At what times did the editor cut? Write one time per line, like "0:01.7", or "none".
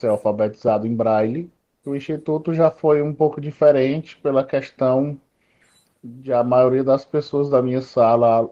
0:01.8